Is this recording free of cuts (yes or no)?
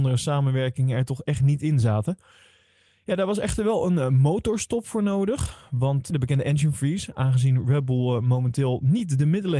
no